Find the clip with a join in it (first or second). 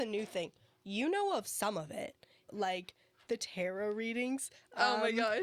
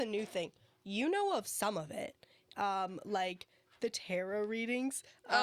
first